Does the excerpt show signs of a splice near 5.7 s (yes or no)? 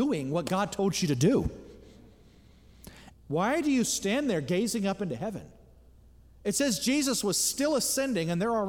no